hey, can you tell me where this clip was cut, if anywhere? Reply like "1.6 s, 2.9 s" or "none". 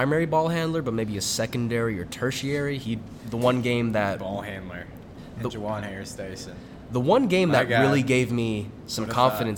none